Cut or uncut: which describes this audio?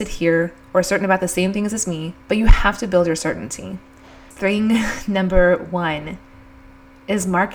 cut